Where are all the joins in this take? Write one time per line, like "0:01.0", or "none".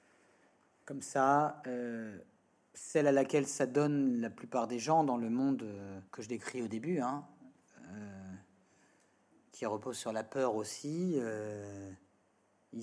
0:06.1